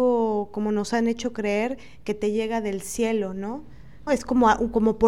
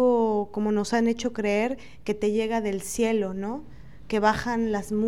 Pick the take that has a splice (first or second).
first